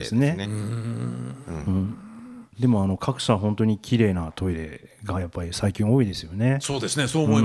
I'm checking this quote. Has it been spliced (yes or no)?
no